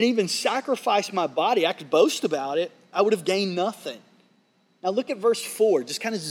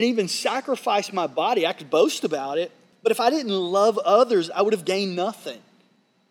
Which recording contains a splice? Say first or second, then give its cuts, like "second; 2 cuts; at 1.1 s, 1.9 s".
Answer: first; 1 cut; at 2.9 s